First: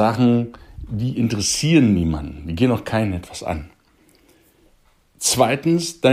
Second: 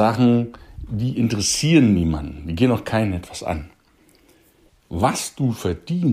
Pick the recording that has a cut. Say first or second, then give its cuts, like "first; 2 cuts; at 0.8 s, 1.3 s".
second; 1 cut; at 4.7 s